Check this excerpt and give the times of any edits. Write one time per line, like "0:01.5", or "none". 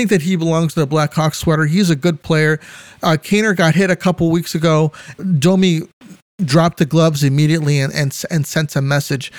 0:05.2